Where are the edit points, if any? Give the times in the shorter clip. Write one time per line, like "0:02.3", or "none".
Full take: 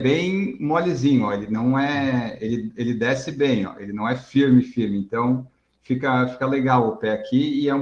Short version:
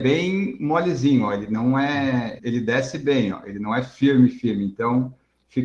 0:02.4